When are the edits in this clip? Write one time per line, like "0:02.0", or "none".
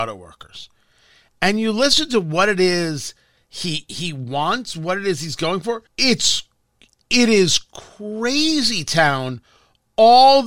0:05.9